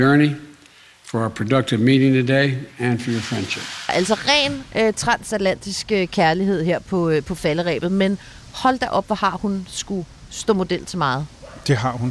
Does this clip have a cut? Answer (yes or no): no